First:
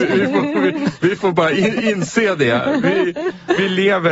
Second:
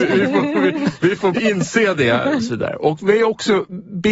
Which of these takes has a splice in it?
second; 2 cuts; at 1.3 s, 2.4 s

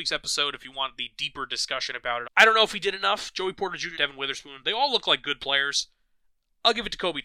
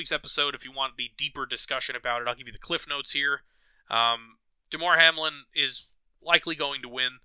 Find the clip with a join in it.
first; 2 cuts; at 2.2 s, 3.9 s

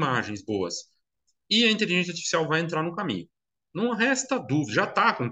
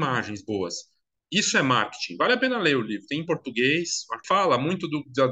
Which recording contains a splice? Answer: second; 2 cuts; at 1.2 s, 4.2 s

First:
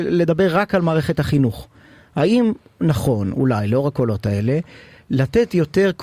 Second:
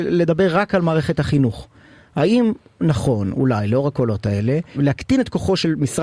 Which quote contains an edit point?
second; 1 cut; at 4.7 s

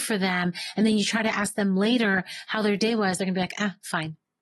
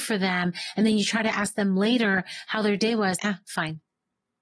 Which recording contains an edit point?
second; 1 cut; at 3.2 s

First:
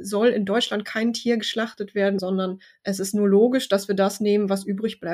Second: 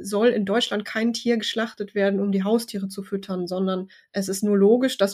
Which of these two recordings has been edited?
first; 1 cut; at 2.2 s

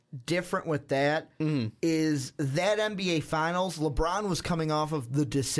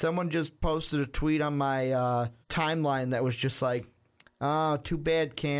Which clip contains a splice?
second; 1 cut; at 2.4 s

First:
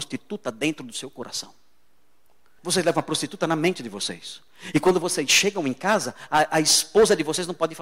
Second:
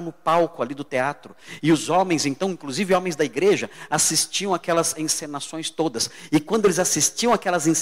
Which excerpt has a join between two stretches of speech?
first; 1 cut; at 2.6 s

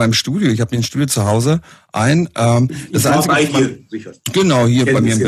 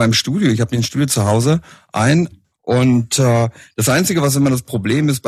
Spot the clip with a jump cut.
second; 1 cut; at 2.3 s

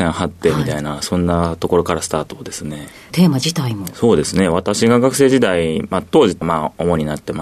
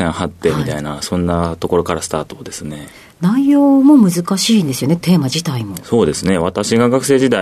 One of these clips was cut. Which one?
first; 2 cuts; at 3.1 s, 6.4 s

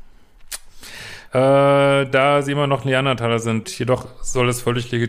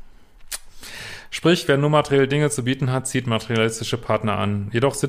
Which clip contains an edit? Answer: first; 2 cuts; at 1.3 s, 3.6 s

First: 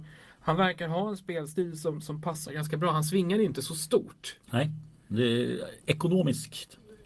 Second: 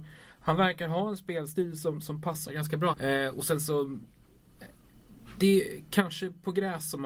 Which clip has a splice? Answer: second; 1 cut; at 2.9 s

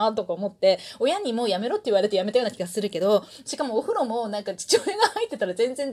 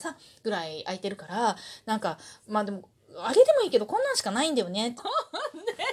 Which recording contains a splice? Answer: second; 1 cut; at 5.0 s

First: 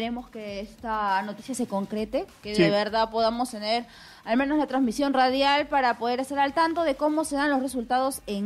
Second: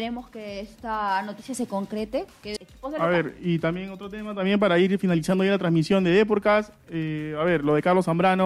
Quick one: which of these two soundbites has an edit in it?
second; 1 cut; at 2.6 s

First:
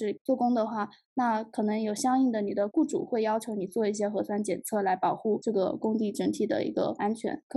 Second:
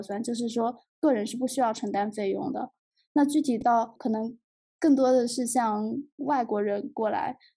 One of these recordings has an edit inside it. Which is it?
first; 1 cut; at 2.7 s

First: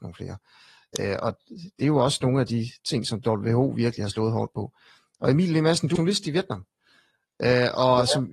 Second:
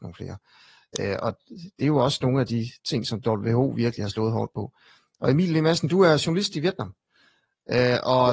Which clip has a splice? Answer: first; 1 cut; at 6.0 s

